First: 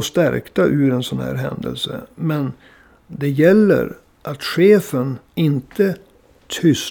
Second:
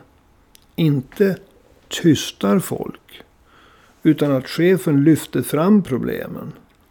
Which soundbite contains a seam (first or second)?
first